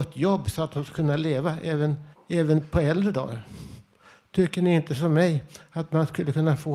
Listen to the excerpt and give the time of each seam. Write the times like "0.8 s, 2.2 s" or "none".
2.1 s